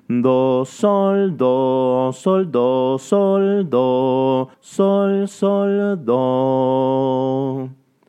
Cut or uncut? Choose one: cut